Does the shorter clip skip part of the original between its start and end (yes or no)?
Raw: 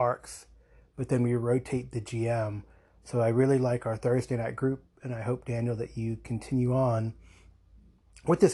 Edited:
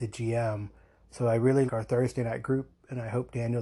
yes